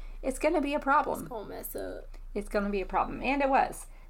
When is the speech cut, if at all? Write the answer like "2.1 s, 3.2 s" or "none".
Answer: none

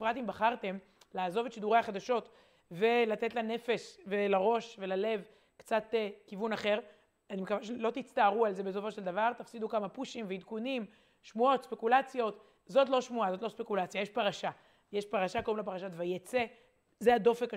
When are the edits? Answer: none

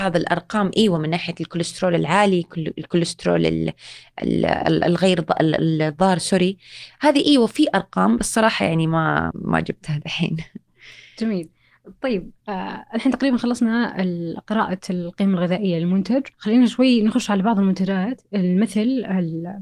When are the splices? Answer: 9.3 s, 16.3 s

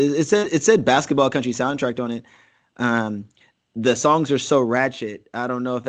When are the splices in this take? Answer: none

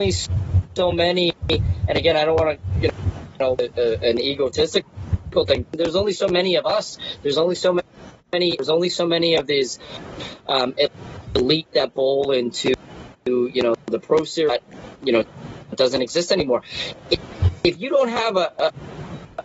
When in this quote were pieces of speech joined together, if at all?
5.6 s

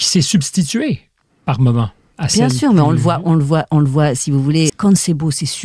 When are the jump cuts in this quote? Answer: 4.7 s

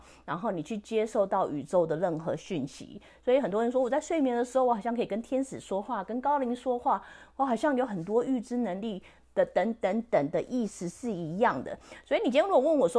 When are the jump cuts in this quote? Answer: none

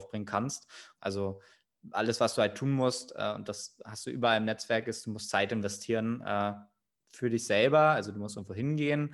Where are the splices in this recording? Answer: 0.9 s

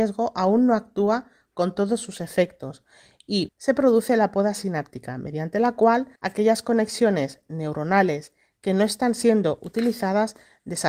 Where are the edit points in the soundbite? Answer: 3.5 s, 6.2 s

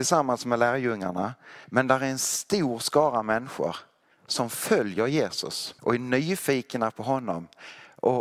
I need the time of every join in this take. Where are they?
1.6 s, 5.8 s

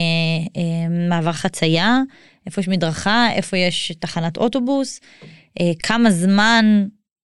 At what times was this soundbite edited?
none

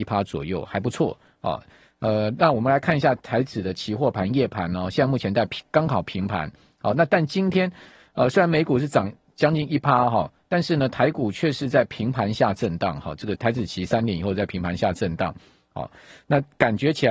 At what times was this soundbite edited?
13.4 s

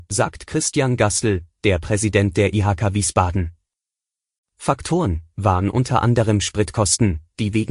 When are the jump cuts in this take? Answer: 5.3 s

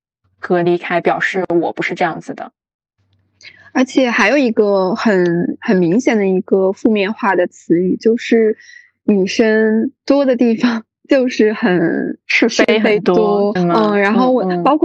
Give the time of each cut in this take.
13.6 s

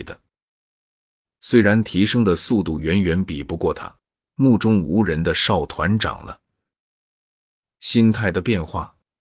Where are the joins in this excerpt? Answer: 4.2 s

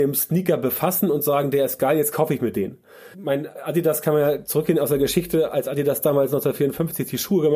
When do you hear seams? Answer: 3.1 s

